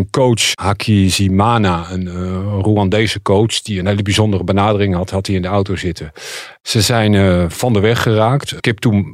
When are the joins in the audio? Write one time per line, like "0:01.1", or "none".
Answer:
0:06.6